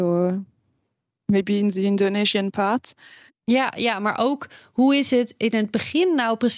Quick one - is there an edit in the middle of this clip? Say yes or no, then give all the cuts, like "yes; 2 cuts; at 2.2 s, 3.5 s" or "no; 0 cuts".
yes; 1 cut; at 3.3 s